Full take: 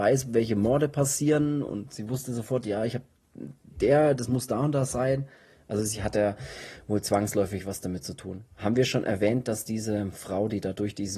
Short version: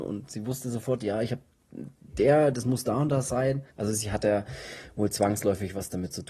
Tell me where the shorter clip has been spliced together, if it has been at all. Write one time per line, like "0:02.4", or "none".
0:03.7